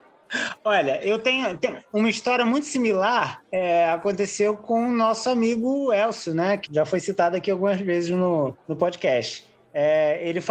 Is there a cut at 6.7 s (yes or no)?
yes